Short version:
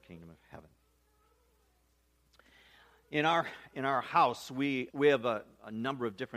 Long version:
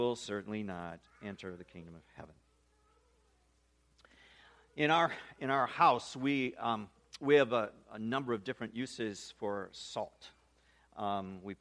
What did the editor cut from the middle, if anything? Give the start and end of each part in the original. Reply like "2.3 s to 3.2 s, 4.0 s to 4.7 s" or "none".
6.6 s to 7.2 s